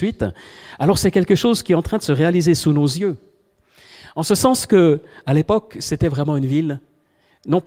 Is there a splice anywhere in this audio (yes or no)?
no